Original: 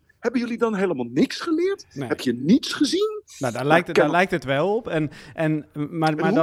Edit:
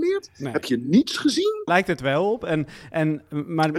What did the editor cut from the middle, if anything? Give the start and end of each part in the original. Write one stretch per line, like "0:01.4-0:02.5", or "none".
0:03.2-0:04.1